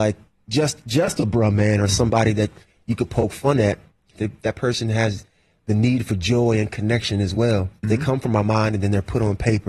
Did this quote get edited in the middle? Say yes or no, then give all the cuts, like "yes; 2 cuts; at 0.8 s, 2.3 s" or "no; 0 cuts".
yes; 2 cuts; at 4.2 s, 7.8 s